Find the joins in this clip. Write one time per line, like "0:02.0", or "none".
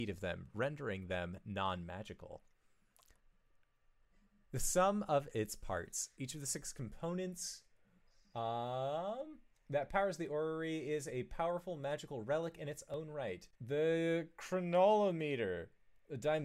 0:13.5